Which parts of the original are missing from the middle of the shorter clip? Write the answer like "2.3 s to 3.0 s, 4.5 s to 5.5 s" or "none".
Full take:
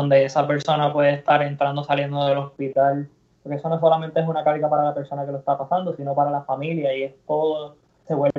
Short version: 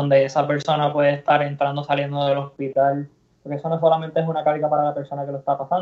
none